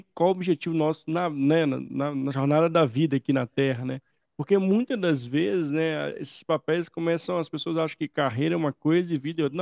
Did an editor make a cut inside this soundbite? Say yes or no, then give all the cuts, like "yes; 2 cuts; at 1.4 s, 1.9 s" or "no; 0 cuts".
no; 0 cuts